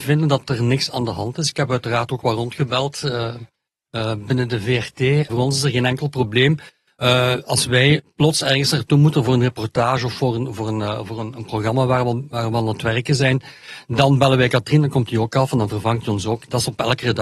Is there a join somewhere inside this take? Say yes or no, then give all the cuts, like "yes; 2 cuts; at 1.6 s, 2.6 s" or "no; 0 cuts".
yes; 1 cut; at 5.3 s